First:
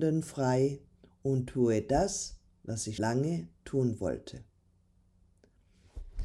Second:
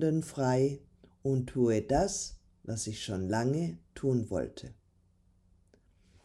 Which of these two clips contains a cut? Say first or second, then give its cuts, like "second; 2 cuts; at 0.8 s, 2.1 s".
first; 1 cut; at 3.0 s